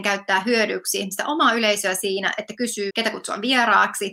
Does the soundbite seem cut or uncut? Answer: cut